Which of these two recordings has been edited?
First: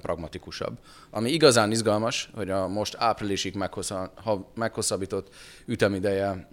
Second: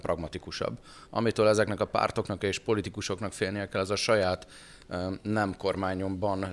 first; 1 cut; at 1.1 s

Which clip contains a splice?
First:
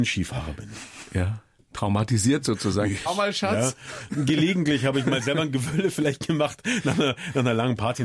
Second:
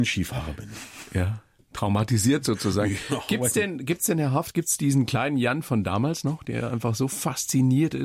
first; 1 cut; at 3.1 s

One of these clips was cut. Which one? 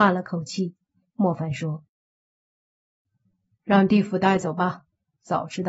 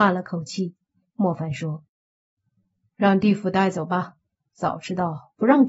second; 1 cut; at 1.9 s

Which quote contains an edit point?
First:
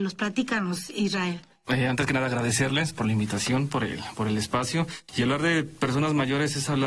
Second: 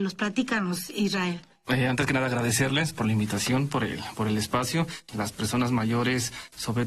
second; 1 cut; at 5.1 s

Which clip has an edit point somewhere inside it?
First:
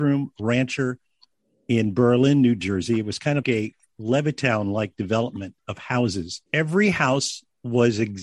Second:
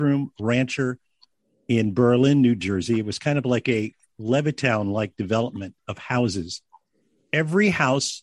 first; 2 cuts; at 3.4 s, 6.5 s

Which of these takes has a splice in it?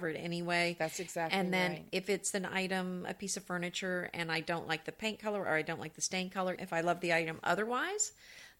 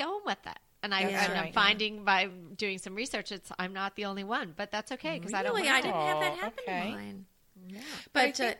first; 1 cut; at 6.6 s

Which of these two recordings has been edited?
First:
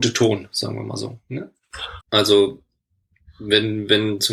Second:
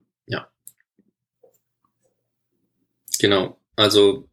first; 1 cut; at 2.0 s

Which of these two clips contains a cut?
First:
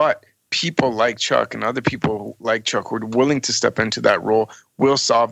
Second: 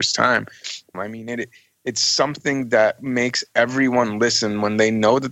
second; 1 cut; at 0.9 s

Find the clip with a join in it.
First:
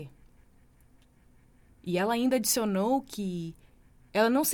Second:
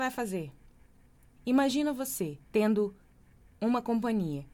second; 2 cuts; at 1.3 s, 2.4 s

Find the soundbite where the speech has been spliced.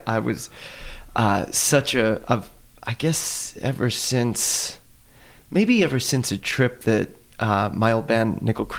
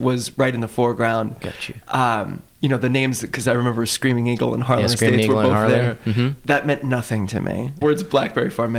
second; 2 cuts; at 2.5 s, 7.8 s

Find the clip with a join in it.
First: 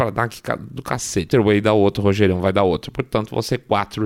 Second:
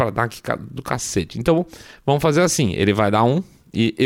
first; 1 cut; at 1.3 s

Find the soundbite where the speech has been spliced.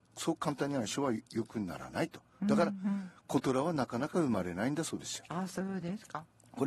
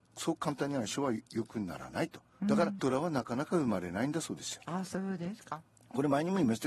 second; 1 cut; at 2.8 s

